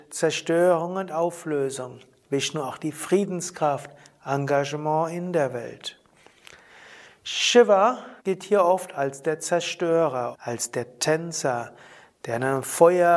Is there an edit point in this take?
yes; 2 cuts; at 8.2 s, 10.3 s

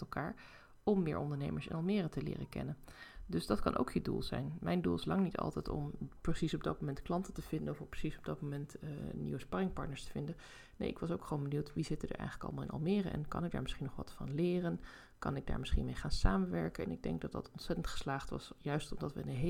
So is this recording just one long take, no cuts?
no; 1 cut; at 16.8 s

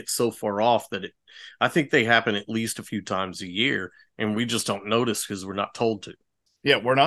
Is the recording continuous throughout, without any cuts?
yes; 0 cuts

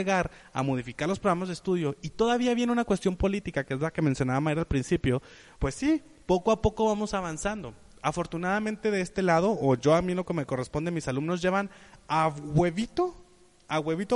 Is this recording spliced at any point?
no; 0 cuts

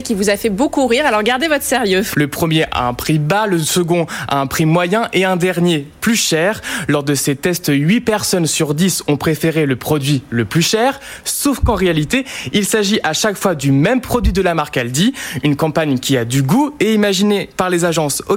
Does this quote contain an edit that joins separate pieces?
yes; 1 cut; at 2.1 s

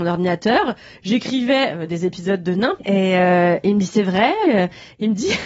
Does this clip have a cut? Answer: yes; 2 cuts; at 2.8 s, 4.4 s

